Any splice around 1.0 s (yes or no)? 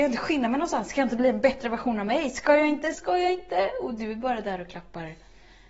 no